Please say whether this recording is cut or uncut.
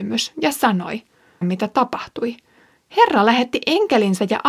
cut